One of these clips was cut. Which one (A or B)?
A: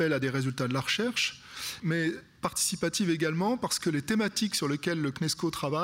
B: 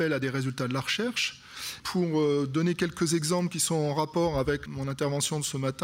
B